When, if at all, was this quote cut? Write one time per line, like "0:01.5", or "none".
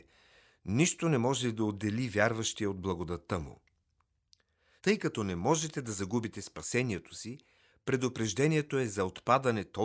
0:04.8